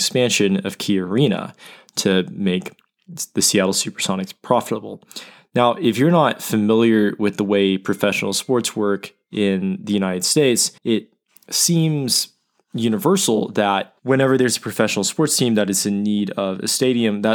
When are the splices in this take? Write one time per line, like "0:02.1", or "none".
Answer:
0:10.8
0:14.0